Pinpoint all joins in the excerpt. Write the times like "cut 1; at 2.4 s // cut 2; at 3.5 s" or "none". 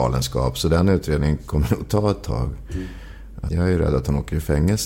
cut 1; at 3.5 s